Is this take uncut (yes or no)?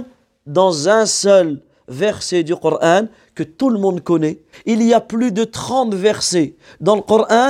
no